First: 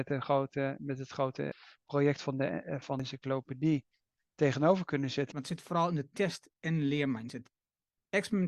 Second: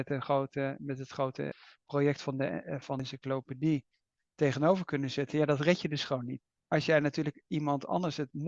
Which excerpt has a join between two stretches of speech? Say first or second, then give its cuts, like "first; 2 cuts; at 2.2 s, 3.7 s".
first; 1 cut; at 5.3 s